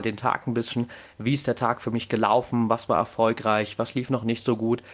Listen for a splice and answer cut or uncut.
uncut